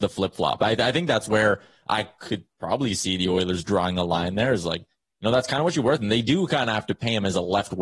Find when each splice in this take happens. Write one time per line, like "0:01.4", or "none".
none